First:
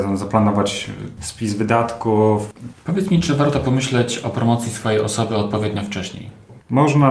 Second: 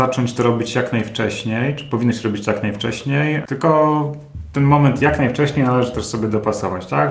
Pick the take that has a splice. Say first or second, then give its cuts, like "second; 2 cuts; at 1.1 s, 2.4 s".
first; 2 cuts; at 1.2 s, 2.7 s